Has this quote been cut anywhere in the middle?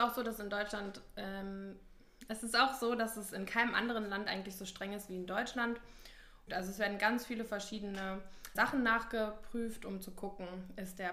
yes; 2 cuts; at 6.5 s, 8.6 s

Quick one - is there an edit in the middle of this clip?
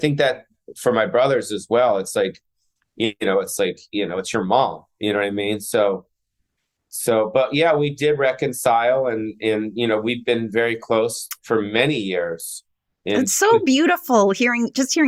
no; 0 cuts

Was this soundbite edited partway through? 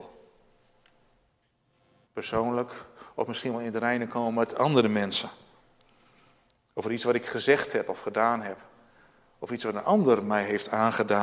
yes; 1 cut; at 2.0 s

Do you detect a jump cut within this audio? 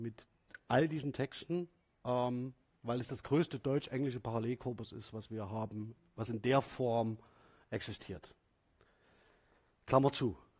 no; 0 cuts

